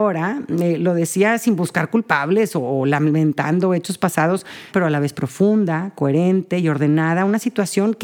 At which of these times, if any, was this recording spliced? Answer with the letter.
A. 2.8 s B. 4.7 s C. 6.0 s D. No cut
B